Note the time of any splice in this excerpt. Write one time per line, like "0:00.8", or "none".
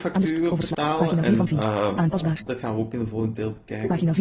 0:02.5